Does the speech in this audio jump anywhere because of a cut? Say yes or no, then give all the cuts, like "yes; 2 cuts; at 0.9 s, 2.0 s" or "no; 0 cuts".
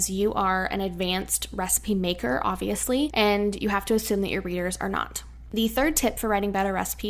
no; 0 cuts